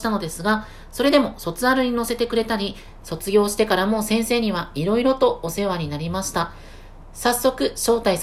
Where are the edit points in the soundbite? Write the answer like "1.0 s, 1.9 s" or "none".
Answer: 3.0 s